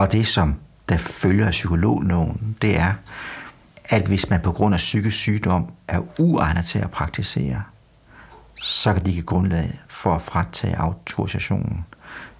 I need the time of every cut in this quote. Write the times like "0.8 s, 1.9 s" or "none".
none